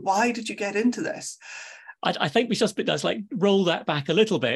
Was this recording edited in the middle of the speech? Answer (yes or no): yes